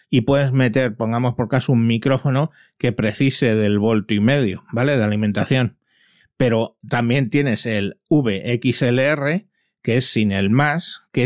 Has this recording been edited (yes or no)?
no